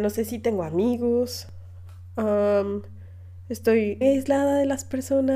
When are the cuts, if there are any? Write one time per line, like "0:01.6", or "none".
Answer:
0:04.0

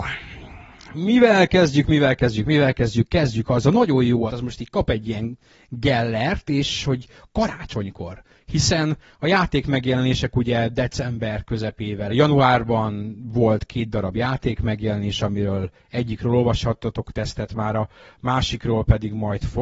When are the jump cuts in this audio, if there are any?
0:04.3
0:12.1

